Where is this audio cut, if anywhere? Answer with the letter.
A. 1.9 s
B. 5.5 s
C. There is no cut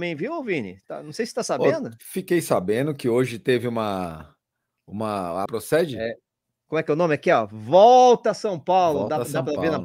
B